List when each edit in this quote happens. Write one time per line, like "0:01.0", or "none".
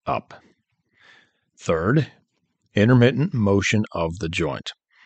none